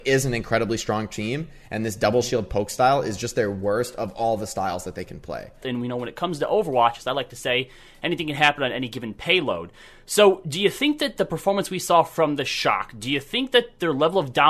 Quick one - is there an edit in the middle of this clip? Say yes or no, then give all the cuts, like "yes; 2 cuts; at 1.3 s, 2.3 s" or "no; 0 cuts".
yes; 1 cut; at 5.6 s